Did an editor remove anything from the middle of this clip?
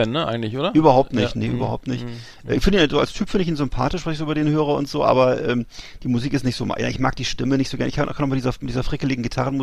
no; 0 cuts

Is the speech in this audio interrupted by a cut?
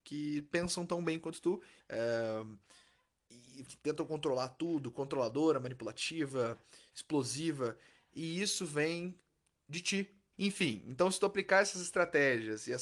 yes; 3 cuts; at 1.8 s, 3.7 s, 10.3 s

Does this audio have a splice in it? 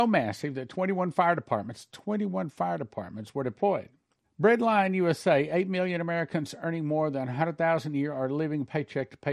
yes; 1 cut; at 4.2 s

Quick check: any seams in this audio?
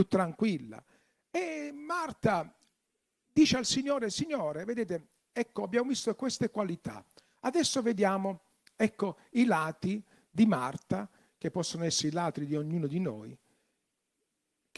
no; 0 cuts

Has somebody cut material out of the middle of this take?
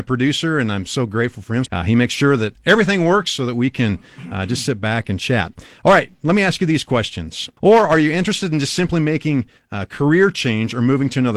yes; 2 cuts; at 1.7 s, 7.6 s

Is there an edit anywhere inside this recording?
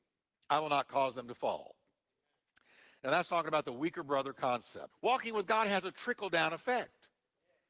yes; 1 cut; at 4.9 s

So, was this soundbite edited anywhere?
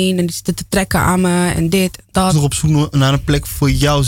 yes; 1 cut; at 2.3 s

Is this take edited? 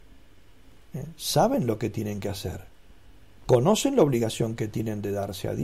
no; 0 cuts

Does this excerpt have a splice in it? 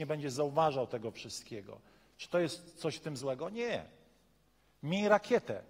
no; 0 cuts

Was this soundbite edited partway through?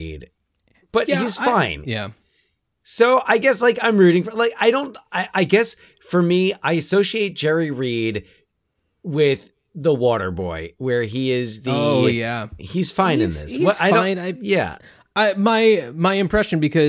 yes; 2 cuts; at 1.8 s, 12.6 s

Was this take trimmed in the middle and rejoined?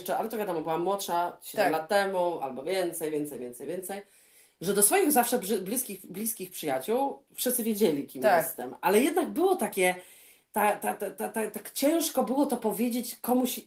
no; 0 cuts

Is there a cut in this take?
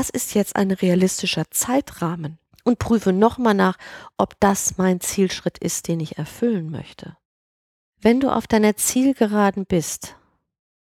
no; 0 cuts

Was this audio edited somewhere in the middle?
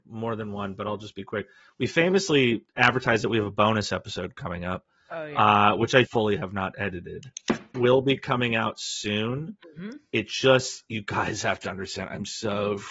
yes; 2 cuts; at 6.0 s, 7.7 s

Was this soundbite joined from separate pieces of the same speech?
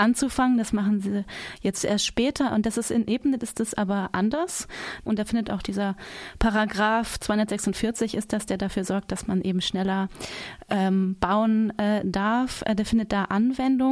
yes; 1 cut; at 5.1 s

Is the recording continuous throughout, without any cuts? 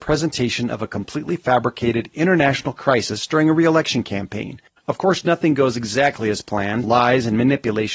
no; 2 cuts; at 4.8 s, 6.8 s

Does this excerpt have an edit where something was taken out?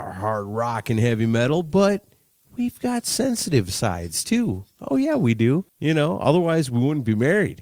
yes; 1 cut; at 5.7 s

